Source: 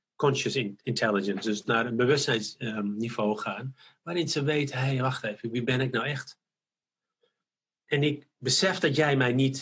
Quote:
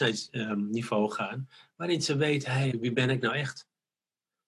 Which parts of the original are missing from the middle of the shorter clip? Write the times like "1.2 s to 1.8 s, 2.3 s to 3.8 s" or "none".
5.0 s to 5.4 s